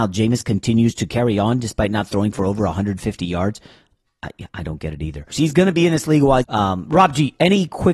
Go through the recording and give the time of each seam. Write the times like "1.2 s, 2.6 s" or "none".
5.3 s, 6.4 s